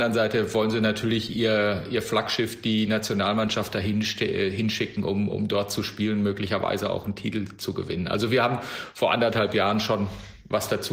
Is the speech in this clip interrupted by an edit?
no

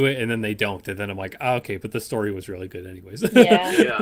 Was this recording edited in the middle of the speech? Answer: no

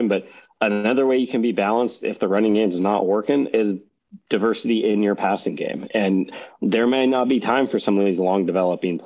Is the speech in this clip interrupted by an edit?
no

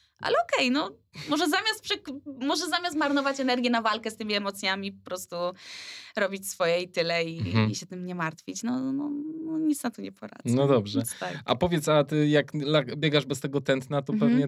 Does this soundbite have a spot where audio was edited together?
no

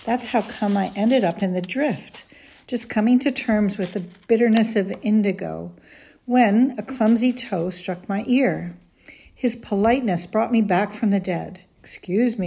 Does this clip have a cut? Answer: no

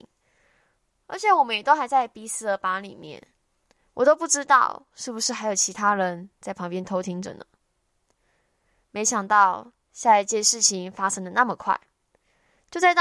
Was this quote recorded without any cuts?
yes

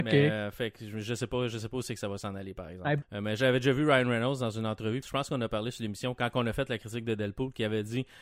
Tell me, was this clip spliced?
yes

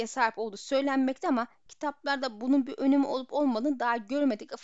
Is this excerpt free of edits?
yes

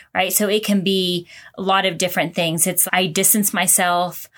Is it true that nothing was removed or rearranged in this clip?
no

